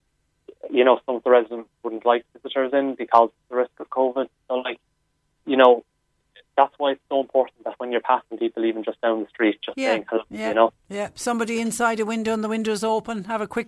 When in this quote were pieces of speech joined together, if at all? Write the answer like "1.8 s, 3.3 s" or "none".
none